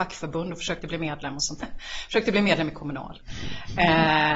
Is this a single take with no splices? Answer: no; 1 cut; at 1.6 s

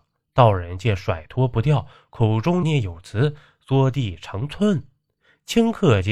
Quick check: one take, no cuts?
no; 1 cut; at 2.6 s

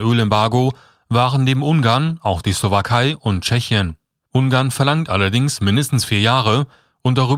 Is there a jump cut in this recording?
yes; 1 cut; at 4.3 s

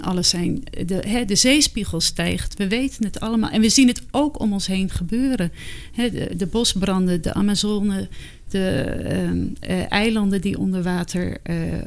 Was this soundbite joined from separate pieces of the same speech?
yes; 1 cut; at 6.3 s

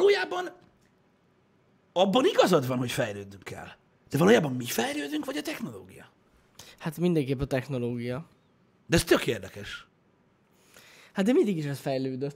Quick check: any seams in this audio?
no; 0 cuts

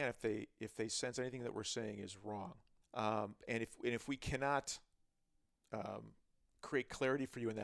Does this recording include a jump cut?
yes; 1 cut; at 2.8 s

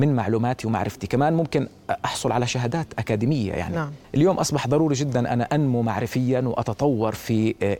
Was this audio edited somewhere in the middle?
yes; 1 cut; at 4.0 s

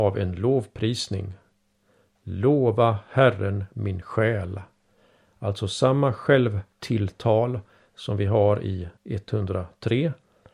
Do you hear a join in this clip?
yes; 2 cuts; at 6.7 s, 9.0 s

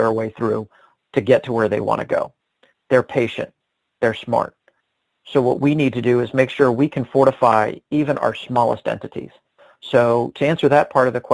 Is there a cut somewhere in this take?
no; 0 cuts

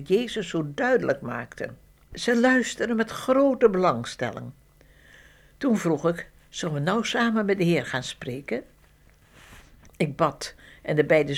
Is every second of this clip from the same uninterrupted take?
yes; 0 cuts

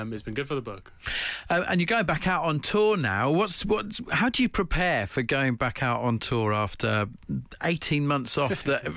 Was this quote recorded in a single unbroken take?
yes; 0 cuts

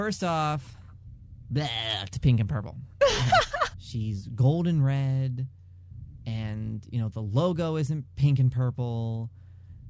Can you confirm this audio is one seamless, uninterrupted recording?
no; 1 cut; at 3.7 s

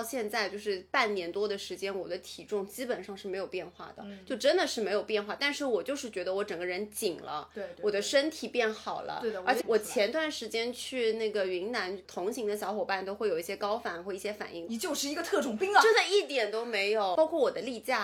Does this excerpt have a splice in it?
yes; 2 cuts; at 9.6 s, 14.7 s

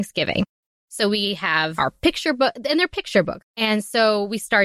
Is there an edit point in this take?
yes; 1 cut; at 3.4 s

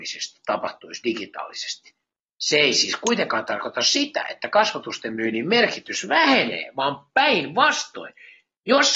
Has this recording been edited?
no; 0 cuts

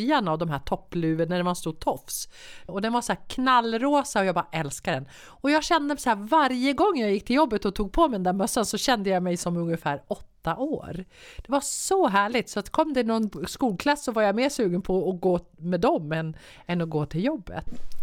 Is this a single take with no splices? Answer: no; 1 cut; at 2.7 s

